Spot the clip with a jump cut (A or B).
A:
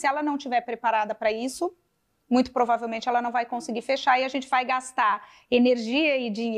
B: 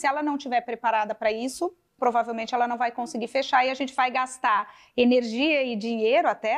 B